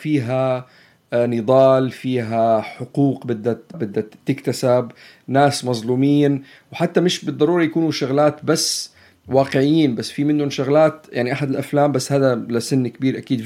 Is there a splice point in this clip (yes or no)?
yes